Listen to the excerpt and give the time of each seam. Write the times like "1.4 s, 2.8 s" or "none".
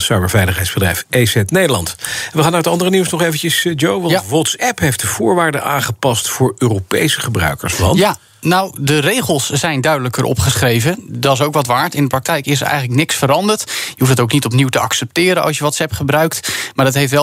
none